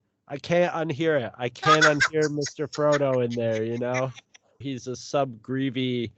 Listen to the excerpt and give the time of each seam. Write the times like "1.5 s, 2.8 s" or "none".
4.6 s